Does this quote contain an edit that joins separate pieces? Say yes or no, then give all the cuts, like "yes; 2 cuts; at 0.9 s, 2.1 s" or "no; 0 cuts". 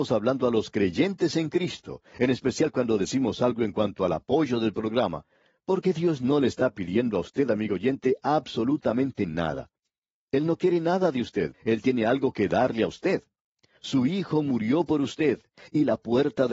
yes; 1 cut; at 11.5 s